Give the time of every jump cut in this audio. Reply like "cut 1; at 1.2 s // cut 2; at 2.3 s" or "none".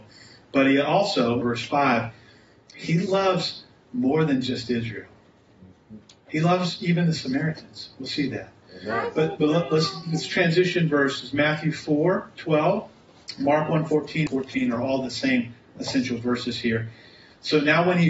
cut 1; at 1.4 s // cut 2; at 14.3 s